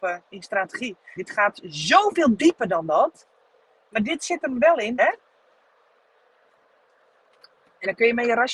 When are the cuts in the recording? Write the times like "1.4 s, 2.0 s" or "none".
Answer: 1.2 s, 5.0 s